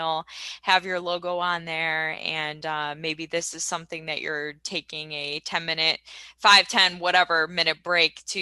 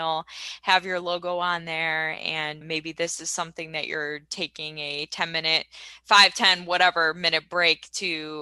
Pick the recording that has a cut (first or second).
second